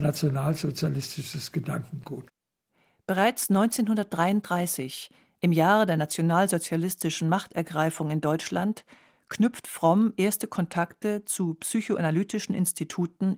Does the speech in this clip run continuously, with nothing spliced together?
yes; 0 cuts

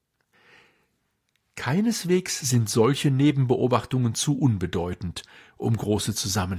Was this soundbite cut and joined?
no; 0 cuts

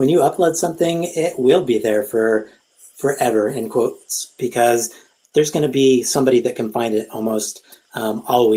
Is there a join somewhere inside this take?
no; 0 cuts

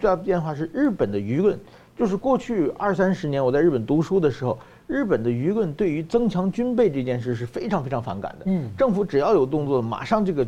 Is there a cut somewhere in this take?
no; 0 cuts

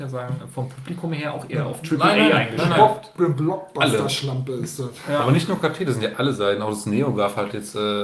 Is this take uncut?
yes; 0 cuts

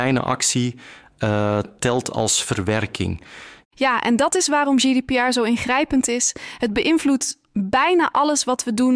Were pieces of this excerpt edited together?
no; 0 cuts

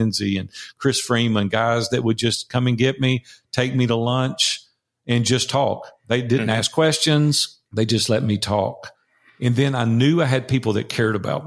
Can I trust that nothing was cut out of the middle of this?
no; 1 cut; at 7.7 s

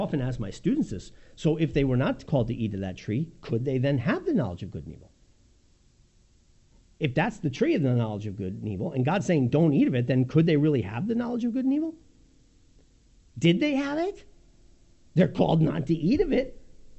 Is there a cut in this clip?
no; 0 cuts

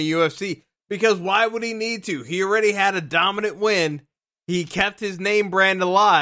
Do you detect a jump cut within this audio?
no; 0 cuts

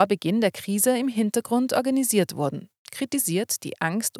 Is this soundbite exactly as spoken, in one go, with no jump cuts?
yes; 0 cuts

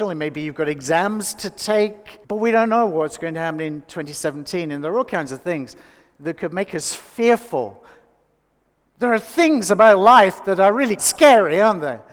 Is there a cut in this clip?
yes; 2 cuts; at 2.2 s, 11.0 s

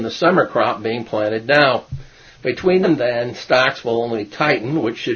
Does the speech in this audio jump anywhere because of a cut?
yes; 1 cut; at 2.8 s

